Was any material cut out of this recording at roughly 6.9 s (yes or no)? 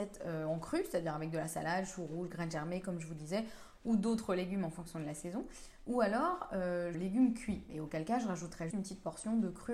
yes